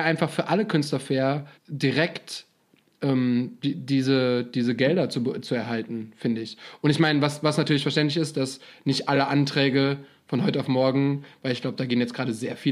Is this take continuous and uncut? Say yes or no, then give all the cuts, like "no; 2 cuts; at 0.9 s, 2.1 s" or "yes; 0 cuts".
no; 1 cut; at 1.6 s